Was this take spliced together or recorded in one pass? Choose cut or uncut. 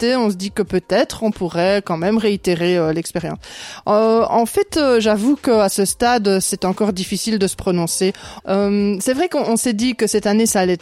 cut